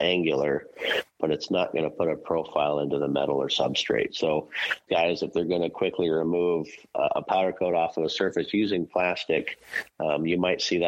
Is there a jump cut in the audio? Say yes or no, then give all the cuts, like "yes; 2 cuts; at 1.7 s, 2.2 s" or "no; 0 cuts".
yes; 1 cut; at 4.9 s